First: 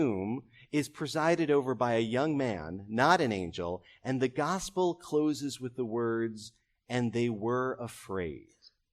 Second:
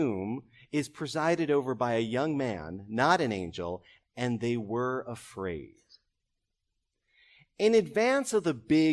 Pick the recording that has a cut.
second; 1 cut; at 4.0 s

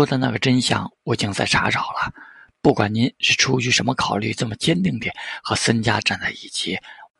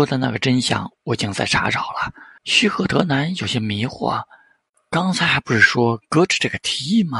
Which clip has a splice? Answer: second; 1 cut; at 2.4 s

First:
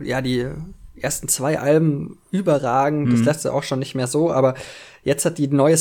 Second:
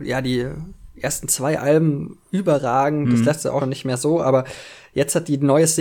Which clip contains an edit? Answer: second; 1 cut; at 3.6 s

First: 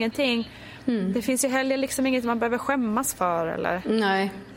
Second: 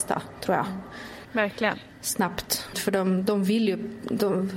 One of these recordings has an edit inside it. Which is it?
second; 2 cuts; at 1.2 s, 2.7 s

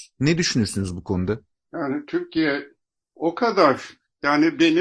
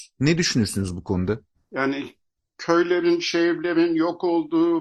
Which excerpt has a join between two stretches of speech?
second; 1 cut; at 1.5 s

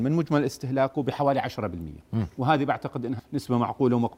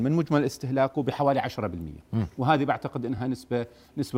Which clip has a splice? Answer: first; 1 cut; at 3.2 s

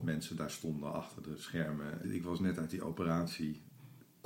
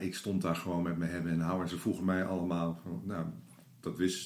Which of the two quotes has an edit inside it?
first; 1 cut; at 2.0 s

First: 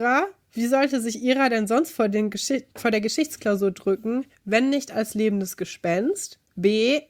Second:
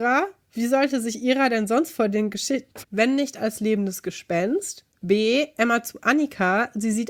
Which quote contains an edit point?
second; 1 cut; at 2.8 s

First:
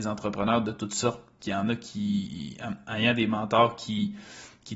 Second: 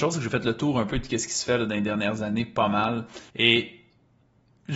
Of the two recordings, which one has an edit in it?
second; 1 cut; at 3.3 s

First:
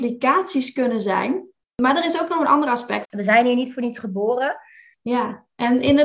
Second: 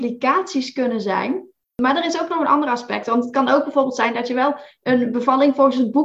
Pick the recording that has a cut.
first; 2 cuts; at 3.0 s, 4.9 s

